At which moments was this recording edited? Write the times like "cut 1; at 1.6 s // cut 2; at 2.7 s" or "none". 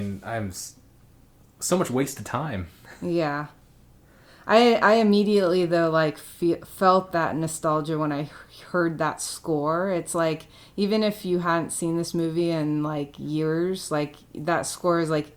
none